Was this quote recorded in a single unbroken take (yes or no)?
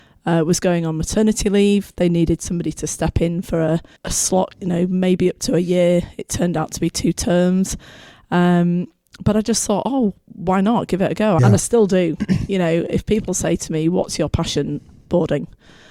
no